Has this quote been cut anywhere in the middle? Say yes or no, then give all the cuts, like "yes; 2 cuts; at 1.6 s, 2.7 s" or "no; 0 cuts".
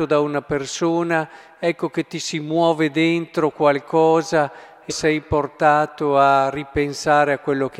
yes; 1 cut; at 4.9 s